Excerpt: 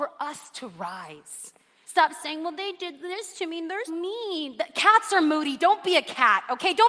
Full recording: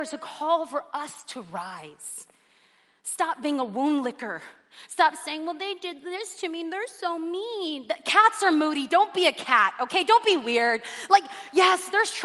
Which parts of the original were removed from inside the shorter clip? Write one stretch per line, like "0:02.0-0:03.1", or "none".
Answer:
0:02.6-0:04.9
0:06.9-0:07.2